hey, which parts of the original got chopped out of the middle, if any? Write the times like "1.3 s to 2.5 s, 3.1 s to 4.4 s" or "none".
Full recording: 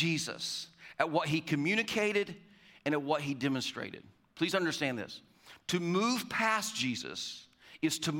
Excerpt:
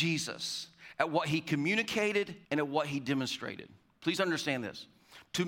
2.4 s to 2.8 s